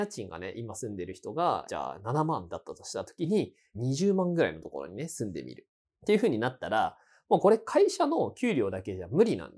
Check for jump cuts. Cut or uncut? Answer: uncut